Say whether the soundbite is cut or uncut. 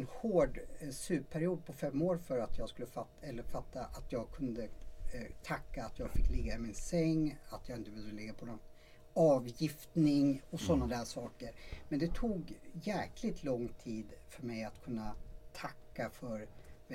uncut